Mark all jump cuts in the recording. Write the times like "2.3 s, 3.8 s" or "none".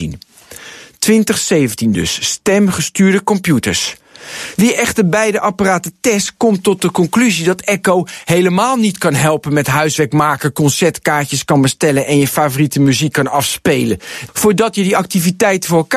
4.5 s